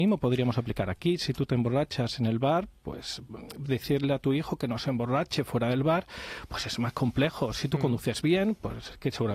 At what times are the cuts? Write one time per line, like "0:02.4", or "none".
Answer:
none